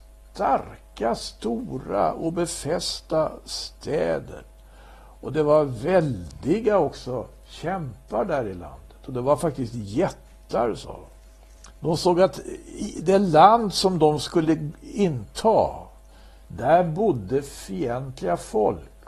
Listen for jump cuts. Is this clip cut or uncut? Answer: cut